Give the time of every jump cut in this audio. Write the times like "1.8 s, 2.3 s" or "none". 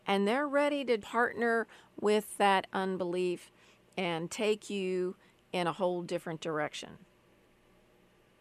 1.0 s

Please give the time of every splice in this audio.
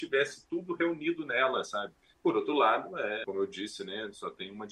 2.1 s, 3.2 s

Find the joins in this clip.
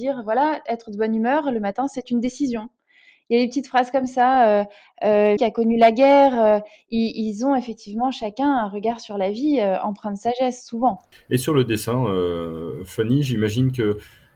5.4 s

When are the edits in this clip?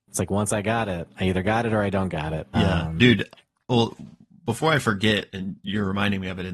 2.5 s, 5.3 s

